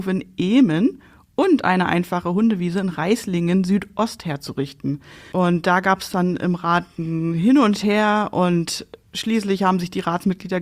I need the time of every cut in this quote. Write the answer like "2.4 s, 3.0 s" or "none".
5.3 s